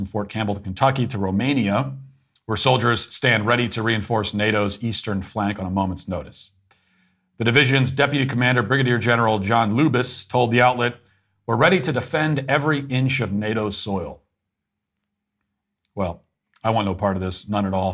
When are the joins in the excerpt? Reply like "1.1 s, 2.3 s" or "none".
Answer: none